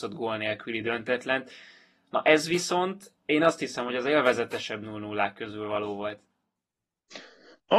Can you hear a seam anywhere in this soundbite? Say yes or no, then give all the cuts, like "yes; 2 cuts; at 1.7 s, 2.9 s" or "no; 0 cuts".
no; 0 cuts